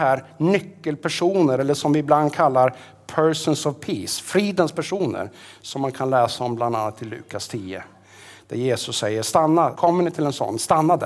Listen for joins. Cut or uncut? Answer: cut